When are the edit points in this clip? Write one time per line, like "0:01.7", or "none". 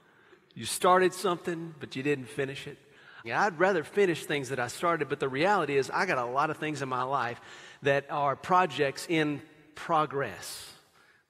0:03.2

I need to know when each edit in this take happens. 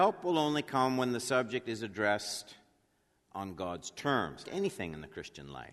0:03.3
0:04.4

